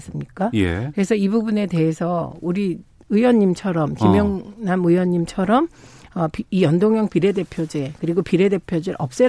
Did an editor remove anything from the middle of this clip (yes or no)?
no